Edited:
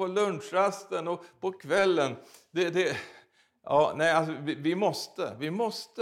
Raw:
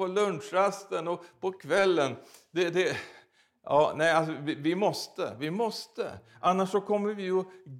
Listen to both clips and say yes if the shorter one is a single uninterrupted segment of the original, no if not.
yes